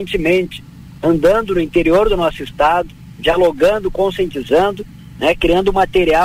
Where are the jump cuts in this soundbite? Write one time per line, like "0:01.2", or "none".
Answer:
none